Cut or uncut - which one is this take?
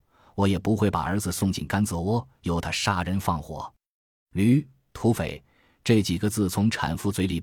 uncut